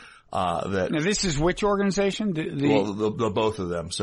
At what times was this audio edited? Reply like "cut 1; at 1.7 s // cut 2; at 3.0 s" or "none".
none